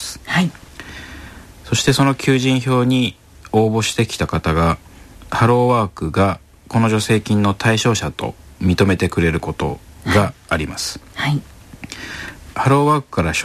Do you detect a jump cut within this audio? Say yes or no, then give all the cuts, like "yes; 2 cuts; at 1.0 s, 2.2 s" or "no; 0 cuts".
yes; 1 cut; at 12.5 s